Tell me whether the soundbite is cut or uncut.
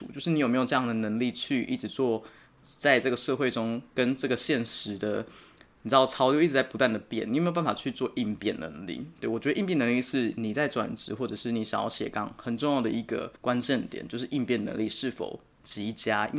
cut